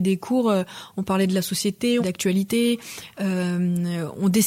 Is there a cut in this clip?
yes; 2 cuts; at 2.0 s, 3.1 s

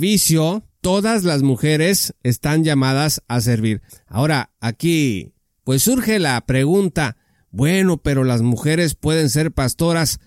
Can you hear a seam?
yes; 1 cut; at 3.9 s

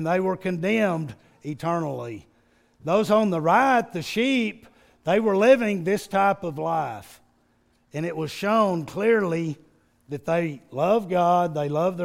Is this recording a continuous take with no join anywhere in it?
yes; 0 cuts

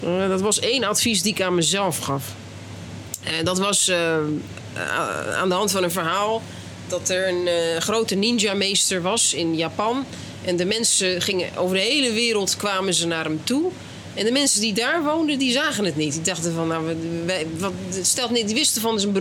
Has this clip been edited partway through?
no; 0 cuts

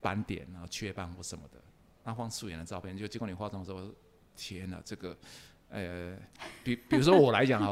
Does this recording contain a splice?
no; 0 cuts

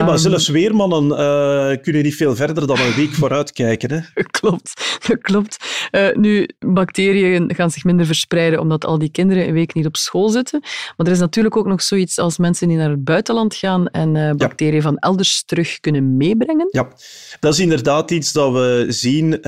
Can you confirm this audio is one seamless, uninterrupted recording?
yes; 0 cuts

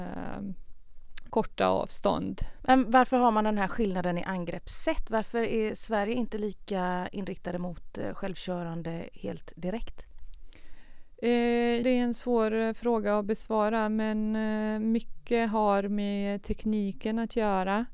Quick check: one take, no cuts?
no; 3 cuts; at 1.3 s, 2.6 s, 11.8 s

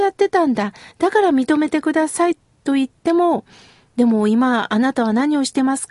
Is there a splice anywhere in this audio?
no; 0 cuts

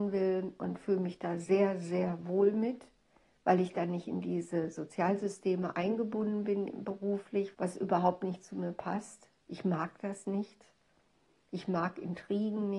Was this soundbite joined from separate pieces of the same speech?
yes; 1 cut; at 7.5 s

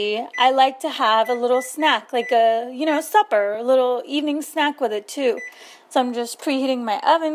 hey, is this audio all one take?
yes; 0 cuts

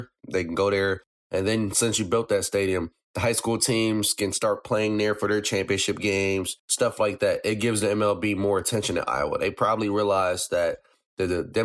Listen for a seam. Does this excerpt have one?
yes; 1 cut; at 6.6 s

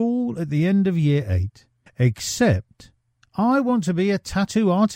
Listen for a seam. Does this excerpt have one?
yes; 1 cut; at 1.9 s

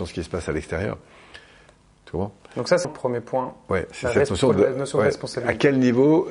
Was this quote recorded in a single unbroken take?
no; 1 cut; at 2.8 s

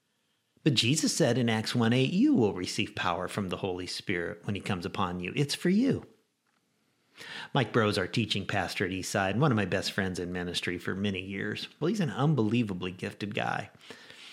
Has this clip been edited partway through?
yes; 1 cut; at 11.8 s

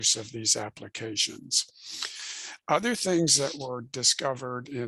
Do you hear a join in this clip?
no; 0 cuts

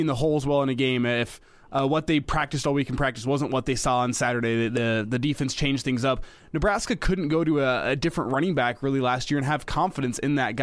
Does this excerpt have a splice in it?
no; 0 cuts

